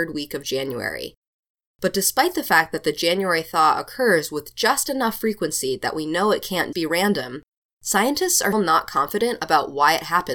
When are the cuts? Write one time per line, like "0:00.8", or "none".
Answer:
0:06.7
0:08.5